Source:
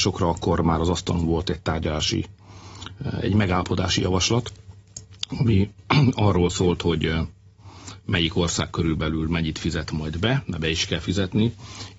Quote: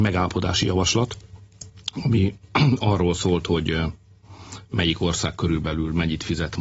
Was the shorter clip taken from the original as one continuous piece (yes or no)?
yes